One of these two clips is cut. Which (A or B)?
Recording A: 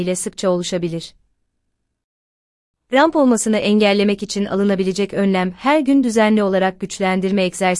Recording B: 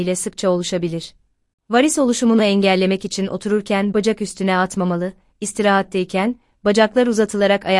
B